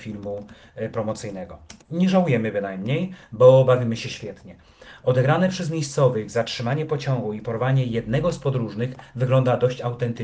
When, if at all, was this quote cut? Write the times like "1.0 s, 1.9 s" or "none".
1.8 s